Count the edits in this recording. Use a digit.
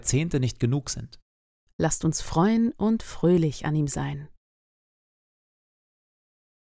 1